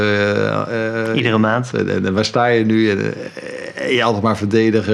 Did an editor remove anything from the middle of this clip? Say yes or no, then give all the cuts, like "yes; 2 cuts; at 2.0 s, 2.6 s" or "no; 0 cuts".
yes; 1 cut; at 1.7 s